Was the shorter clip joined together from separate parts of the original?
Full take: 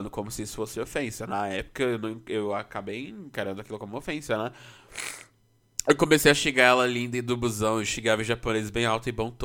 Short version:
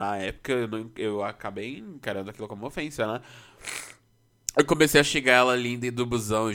no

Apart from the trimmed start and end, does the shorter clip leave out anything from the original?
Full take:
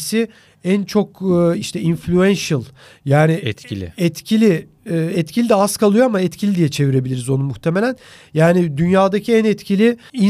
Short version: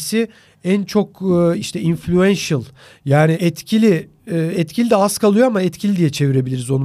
yes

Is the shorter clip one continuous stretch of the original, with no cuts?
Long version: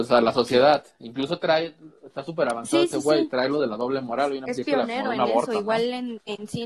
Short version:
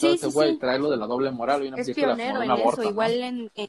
yes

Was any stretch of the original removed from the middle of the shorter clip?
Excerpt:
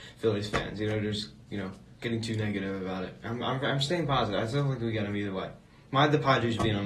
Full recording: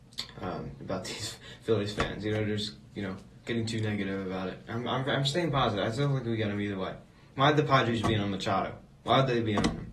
no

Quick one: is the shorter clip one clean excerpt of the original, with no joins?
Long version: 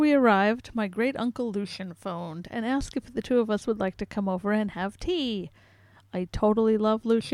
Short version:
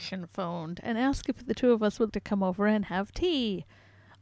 no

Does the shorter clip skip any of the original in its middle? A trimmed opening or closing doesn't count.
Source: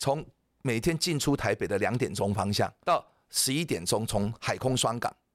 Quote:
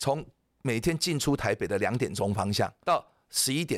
no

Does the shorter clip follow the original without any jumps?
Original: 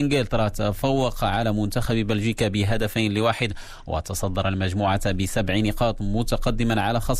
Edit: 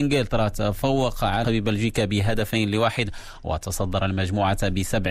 no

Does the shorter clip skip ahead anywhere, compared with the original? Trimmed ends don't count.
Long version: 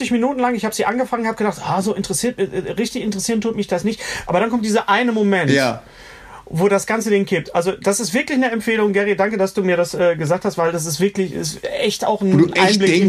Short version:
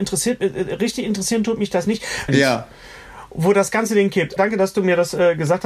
yes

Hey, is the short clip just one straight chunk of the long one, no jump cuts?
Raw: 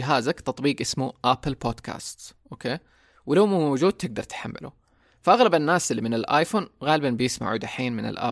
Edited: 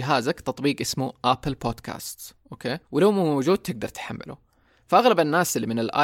no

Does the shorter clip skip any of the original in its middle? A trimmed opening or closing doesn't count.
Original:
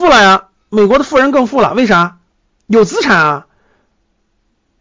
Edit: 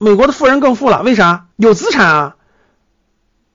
yes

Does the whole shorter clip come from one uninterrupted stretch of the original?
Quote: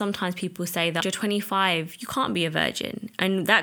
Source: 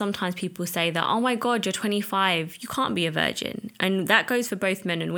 no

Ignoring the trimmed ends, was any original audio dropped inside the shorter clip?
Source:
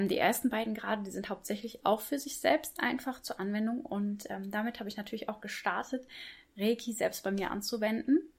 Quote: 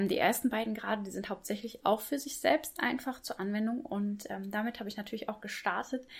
no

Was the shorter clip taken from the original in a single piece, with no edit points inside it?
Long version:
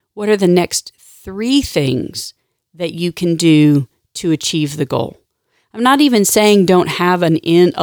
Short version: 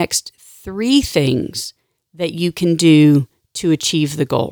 yes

